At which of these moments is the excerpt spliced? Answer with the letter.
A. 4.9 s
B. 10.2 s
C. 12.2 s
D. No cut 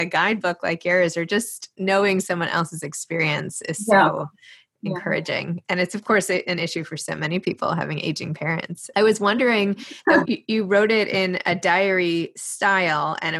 B